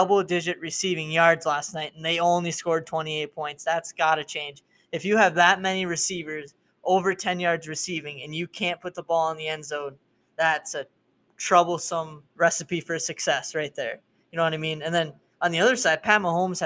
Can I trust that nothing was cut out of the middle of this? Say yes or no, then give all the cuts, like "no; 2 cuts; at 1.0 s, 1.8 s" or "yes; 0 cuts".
no; 1 cut; at 12.3 s